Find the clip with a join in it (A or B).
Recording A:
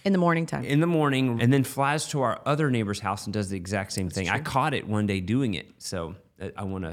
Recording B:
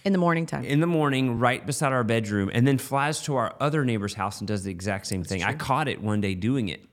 A